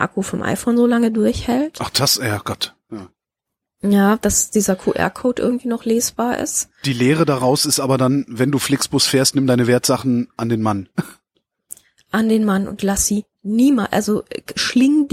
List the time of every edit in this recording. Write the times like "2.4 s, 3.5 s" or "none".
none